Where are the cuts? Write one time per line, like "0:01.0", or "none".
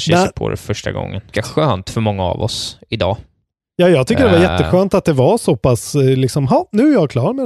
0:01.3

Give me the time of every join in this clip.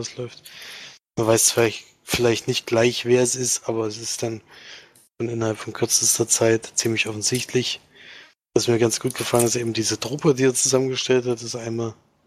none

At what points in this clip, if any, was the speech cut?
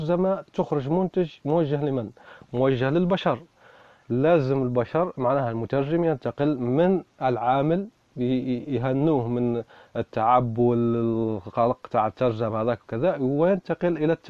none

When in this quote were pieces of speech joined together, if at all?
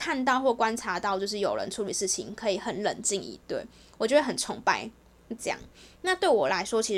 0:05.4

